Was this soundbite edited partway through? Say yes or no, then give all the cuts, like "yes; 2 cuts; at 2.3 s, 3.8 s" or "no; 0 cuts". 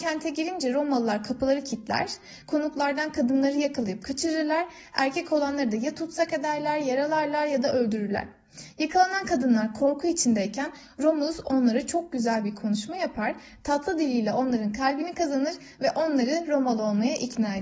no; 0 cuts